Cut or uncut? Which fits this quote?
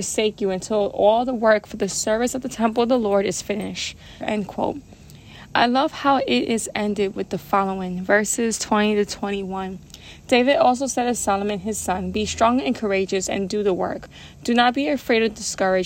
cut